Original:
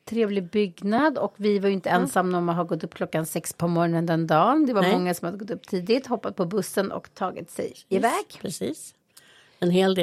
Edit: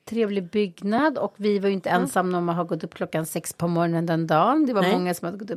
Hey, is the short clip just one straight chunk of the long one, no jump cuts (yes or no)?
yes